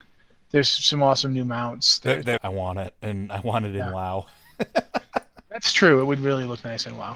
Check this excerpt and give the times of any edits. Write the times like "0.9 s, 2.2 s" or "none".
2.4 s